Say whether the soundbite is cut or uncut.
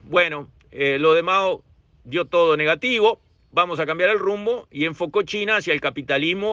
uncut